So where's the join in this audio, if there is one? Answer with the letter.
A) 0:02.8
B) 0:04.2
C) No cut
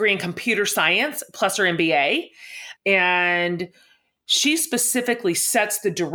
A